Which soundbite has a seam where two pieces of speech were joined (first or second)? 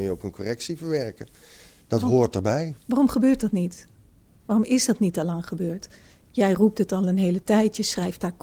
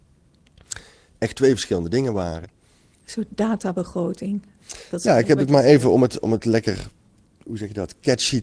second